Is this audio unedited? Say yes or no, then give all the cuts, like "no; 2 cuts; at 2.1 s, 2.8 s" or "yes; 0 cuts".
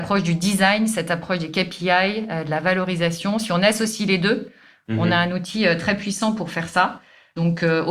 yes; 0 cuts